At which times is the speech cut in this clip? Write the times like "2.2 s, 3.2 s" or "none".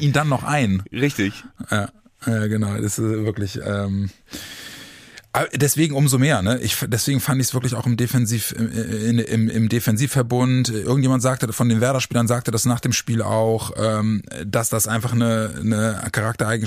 3.6 s